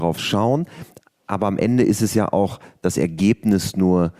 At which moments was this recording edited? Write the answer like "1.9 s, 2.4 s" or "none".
none